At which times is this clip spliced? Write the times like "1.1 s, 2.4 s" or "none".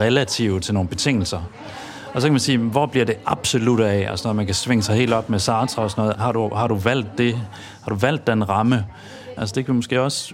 6.1 s, 9.4 s